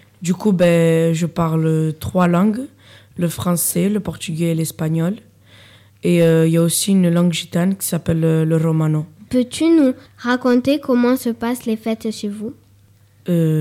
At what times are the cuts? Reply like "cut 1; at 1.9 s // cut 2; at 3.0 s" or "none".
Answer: cut 1; at 9.3 s